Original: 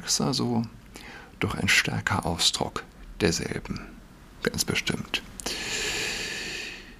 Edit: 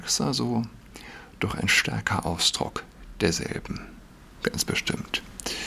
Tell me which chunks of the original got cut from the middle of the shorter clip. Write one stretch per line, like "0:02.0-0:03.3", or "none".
none